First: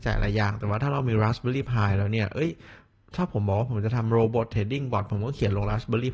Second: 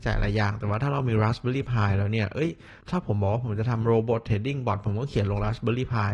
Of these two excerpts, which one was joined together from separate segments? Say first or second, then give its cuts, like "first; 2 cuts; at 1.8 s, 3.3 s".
second; 1 cut; at 2.8 s